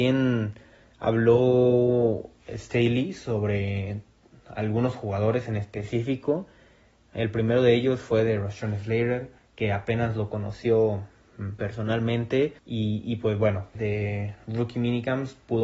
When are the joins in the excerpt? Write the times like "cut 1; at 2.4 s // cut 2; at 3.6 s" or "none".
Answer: cut 1; at 12.6 s // cut 2; at 13.7 s